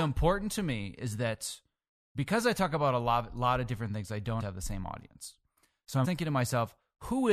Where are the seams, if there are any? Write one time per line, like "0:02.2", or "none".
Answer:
0:04.4
0:06.0